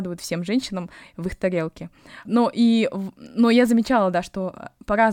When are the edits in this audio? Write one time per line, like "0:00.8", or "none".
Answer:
0:02.3